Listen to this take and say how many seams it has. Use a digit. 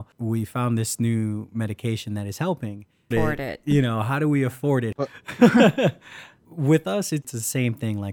2